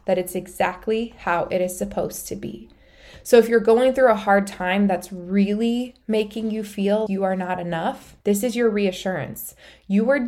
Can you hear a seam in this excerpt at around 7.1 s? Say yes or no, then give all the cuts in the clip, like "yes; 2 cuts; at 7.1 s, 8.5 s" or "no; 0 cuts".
yes; 2 cuts; at 7.1 s, 8.2 s